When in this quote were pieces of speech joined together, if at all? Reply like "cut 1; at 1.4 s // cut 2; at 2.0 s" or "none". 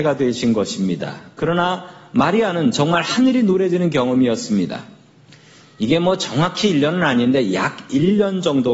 cut 1; at 5.6 s